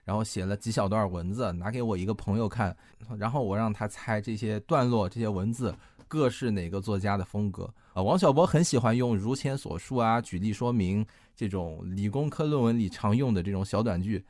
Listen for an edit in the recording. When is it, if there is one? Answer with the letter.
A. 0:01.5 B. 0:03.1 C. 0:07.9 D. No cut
C